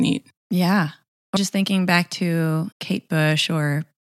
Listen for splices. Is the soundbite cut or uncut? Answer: cut